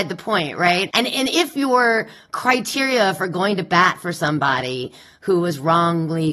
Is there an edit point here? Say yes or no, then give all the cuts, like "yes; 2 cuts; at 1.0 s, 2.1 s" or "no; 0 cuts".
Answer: yes; 1 cut; at 0.9 s